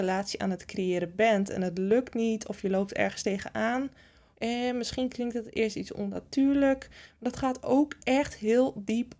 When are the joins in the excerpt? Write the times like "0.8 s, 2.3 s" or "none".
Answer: 4.3 s